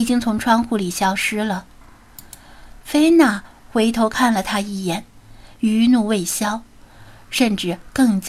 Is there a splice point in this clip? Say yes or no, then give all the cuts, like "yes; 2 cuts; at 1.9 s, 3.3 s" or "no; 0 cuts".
no; 0 cuts